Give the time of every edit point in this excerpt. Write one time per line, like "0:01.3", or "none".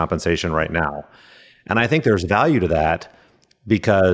none